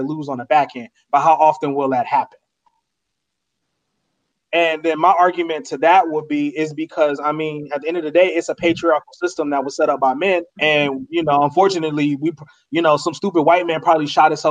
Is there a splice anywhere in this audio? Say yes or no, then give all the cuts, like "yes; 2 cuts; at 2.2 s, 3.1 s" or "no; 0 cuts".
yes; 2 cuts; at 4.3 s, 10.5 s